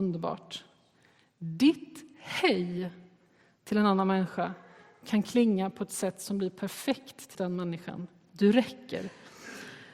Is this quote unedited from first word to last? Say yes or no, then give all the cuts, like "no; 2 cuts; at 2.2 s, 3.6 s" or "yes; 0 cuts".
no; 1 cut; at 7.3 s